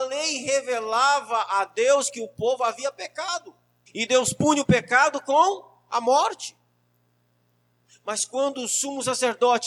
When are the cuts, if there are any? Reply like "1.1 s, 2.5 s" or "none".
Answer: 3.9 s